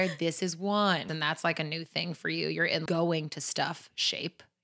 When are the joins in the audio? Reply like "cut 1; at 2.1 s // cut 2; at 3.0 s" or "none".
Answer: cut 1; at 1.1 s // cut 2; at 2.9 s